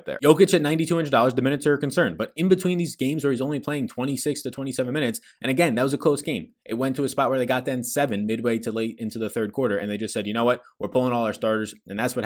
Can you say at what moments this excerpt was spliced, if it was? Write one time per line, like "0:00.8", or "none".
none

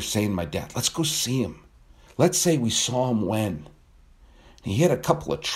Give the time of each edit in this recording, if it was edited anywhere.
0:02.1

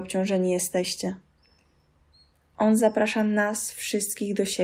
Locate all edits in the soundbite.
none

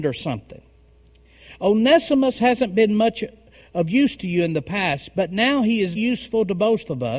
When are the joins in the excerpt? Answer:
0:05.9

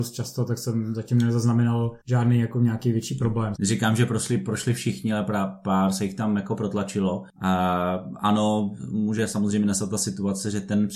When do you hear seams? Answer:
0:02.0
0:03.6

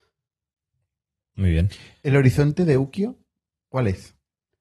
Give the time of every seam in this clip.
none

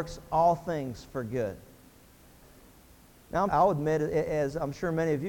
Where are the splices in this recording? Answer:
0:03.5

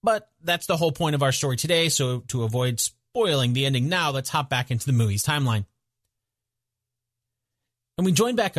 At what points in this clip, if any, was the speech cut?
none

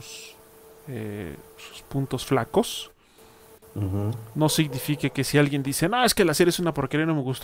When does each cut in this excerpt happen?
0:01.5

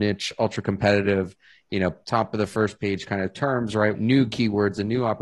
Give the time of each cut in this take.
0:03.9

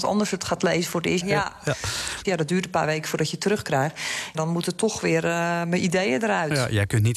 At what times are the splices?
0:01.2
0:02.2
0:04.3

